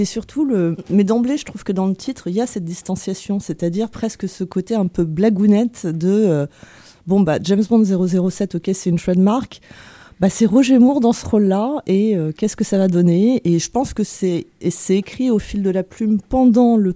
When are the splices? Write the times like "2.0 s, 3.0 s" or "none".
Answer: none